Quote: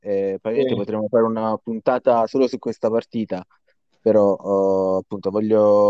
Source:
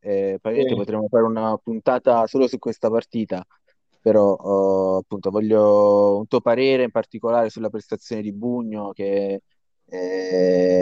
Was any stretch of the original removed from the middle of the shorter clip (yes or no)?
no